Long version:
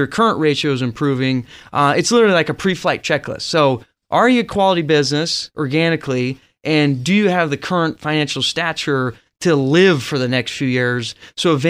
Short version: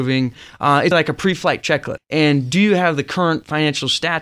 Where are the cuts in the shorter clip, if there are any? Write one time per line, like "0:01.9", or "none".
0:00.9
0:02.0